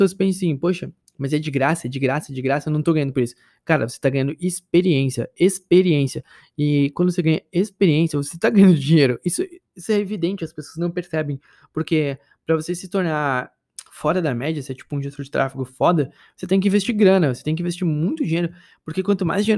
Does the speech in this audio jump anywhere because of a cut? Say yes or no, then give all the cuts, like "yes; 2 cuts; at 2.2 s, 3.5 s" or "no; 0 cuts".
no; 0 cuts